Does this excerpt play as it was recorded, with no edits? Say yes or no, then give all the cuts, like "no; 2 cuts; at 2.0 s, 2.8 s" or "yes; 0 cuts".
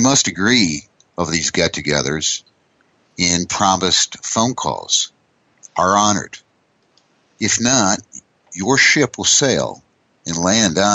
yes; 0 cuts